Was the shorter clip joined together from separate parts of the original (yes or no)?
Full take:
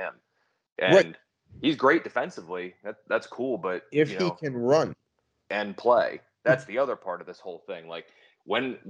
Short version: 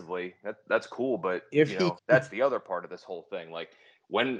yes